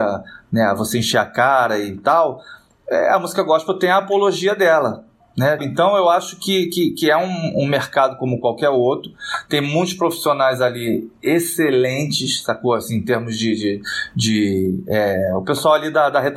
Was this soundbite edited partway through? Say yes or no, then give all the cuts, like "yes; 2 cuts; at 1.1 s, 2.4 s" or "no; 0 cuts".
yes; 1 cut; at 5.6 s